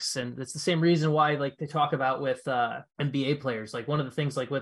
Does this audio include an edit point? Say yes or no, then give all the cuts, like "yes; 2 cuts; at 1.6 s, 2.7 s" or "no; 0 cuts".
yes; 1 cut; at 2.9 s